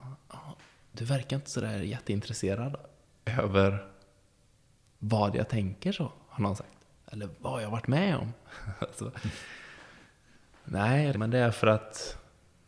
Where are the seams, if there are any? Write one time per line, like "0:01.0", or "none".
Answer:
0:11.1